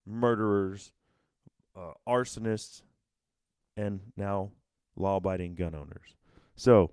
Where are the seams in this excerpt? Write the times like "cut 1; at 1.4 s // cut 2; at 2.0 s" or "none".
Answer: none